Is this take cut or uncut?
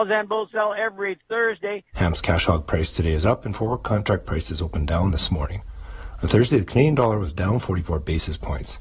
cut